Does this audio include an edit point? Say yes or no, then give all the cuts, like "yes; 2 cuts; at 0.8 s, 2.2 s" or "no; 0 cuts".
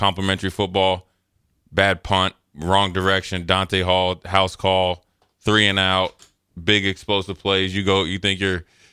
no; 0 cuts